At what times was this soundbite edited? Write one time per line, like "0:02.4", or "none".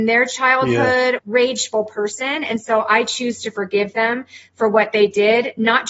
0:01.2